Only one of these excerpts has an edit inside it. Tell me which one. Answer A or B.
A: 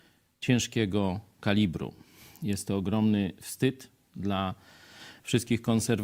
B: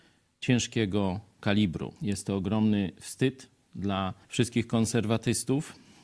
B